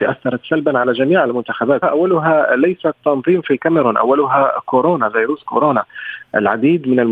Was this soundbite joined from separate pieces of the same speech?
yes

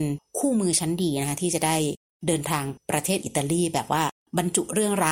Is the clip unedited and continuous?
no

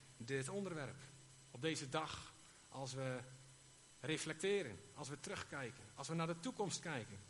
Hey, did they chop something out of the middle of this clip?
yes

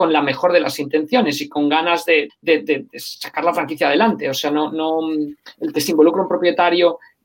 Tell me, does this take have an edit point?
yes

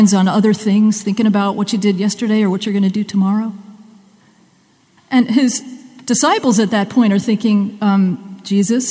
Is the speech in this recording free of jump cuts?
no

